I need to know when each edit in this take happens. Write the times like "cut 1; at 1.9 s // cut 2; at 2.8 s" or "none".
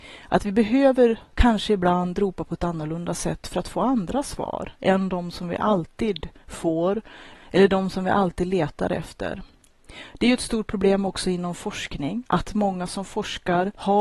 cut 1; at 7.3 s // cut 2; at 12.3 s